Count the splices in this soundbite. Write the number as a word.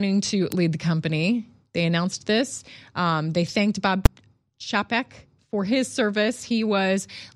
zero